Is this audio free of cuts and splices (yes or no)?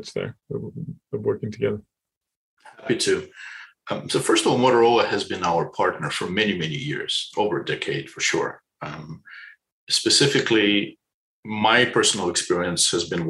yes